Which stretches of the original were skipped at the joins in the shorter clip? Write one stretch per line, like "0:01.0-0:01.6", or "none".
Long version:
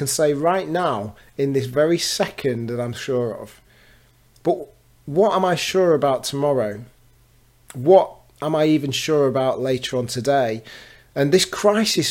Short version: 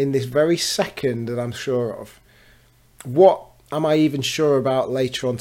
0:04.3-0:07.6